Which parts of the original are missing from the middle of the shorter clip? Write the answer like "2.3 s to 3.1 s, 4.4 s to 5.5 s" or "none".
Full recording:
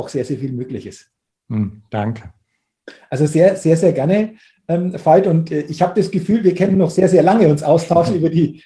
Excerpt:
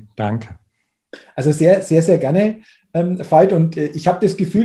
none